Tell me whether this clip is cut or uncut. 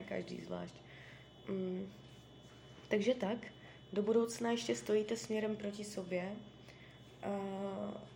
uncut